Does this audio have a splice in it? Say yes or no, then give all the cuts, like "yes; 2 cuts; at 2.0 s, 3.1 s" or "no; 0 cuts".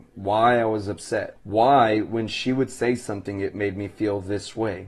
yes; 1 cut; at 1.4 s